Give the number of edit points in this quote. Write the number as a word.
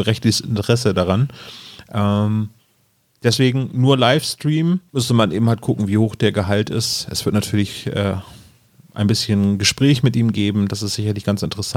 one